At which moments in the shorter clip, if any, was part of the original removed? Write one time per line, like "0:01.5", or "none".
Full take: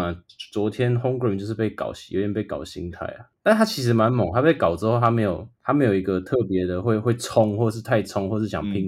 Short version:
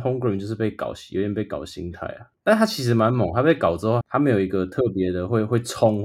0:04.0